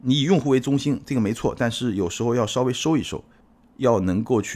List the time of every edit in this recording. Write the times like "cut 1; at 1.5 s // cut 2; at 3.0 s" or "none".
none